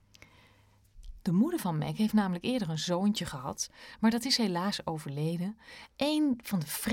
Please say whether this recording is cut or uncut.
cut